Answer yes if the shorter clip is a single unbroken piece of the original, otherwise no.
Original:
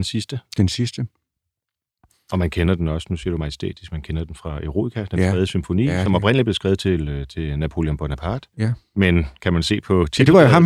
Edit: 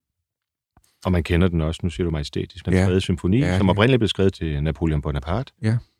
no